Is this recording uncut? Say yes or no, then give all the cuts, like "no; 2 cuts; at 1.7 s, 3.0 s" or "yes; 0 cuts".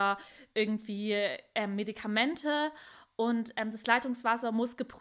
yes; 0 cuts